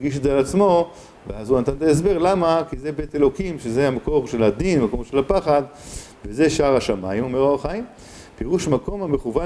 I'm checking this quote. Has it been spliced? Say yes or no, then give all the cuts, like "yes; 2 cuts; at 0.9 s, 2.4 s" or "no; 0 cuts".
no; 0 cuts